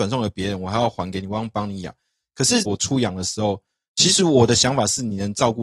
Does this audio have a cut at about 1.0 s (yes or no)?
no